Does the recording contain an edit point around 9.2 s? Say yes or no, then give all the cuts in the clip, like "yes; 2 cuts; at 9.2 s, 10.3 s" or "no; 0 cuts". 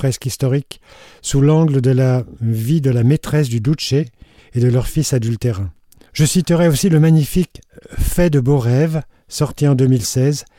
no; 2 cuts; at 4.4 s, 6.0 s